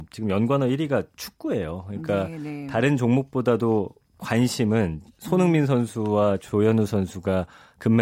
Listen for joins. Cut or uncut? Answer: uncut